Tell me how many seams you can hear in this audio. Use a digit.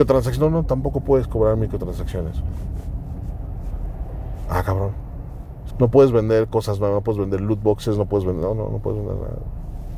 1